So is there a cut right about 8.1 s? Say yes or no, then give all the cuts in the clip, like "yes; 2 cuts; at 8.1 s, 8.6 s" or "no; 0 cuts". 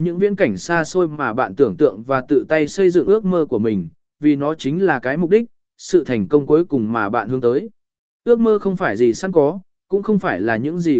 yes; 1 cut; at 8.1 s